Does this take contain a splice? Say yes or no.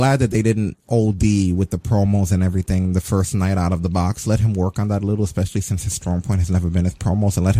no